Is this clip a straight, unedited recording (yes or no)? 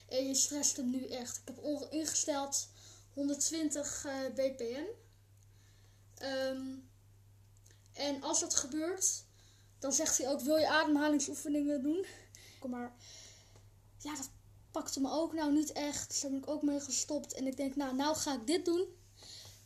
no